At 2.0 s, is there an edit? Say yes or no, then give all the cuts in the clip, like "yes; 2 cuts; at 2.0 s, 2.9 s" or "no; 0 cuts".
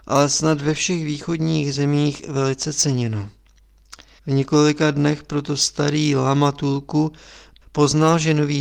no; 2 cuts; at 4.2 s, 7.6 s